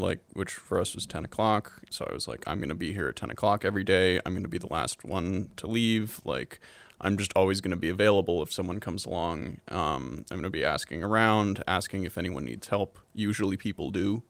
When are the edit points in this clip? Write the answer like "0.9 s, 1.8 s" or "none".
none